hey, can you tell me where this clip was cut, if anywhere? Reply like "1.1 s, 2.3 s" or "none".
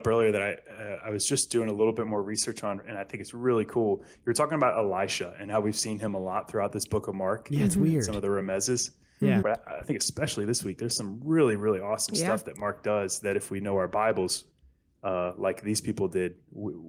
9.4 s